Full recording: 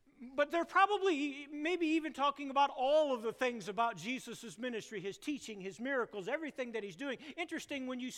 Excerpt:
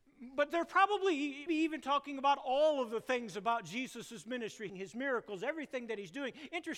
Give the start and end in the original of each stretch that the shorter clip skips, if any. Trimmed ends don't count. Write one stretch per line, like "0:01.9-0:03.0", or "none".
0:01.5-0:01.8
0:05.0-0:05.5